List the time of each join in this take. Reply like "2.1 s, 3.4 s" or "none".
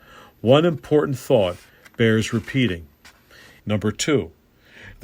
3.6 s